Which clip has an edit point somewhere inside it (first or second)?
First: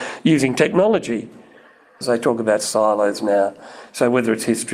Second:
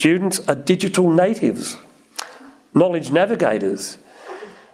first